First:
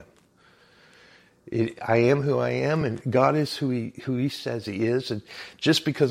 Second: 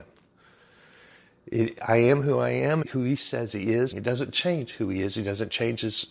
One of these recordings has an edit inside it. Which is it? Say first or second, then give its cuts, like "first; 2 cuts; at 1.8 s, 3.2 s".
second; 2 cuts; at 2.8 s, 3.9 s